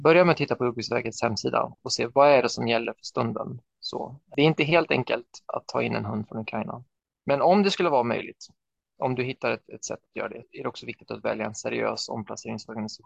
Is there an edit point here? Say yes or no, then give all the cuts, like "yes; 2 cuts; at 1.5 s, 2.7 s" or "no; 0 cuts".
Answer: yes; 1 cut; at 10.4 s